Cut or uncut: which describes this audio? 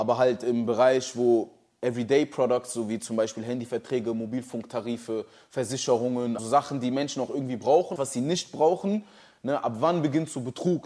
cut